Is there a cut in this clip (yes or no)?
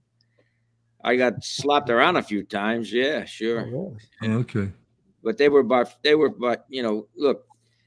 no